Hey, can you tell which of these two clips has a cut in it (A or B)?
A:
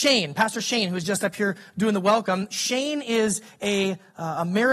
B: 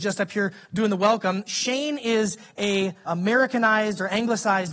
B